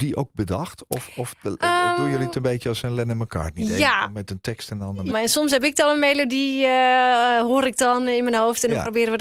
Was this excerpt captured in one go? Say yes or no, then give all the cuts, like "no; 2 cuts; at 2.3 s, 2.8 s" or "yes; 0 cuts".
no; 1 cut; at 5.1 s